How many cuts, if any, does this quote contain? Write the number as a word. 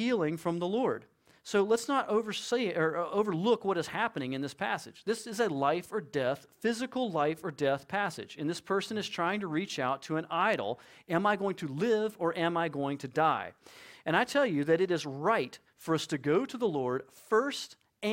zero